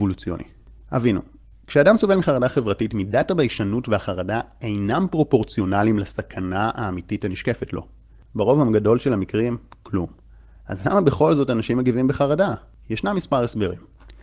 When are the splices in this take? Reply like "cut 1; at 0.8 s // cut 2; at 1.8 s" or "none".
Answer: cut 1; at 8.3 s